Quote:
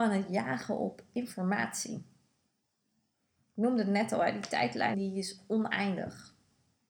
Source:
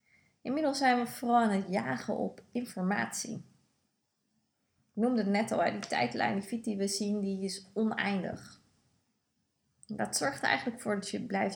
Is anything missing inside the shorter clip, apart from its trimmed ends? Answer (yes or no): yes